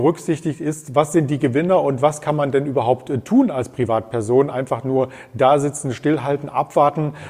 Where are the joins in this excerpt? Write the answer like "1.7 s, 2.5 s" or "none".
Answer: none